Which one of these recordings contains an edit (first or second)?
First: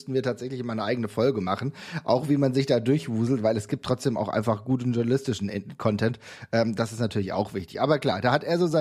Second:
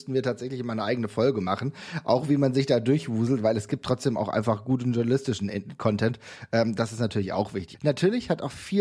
second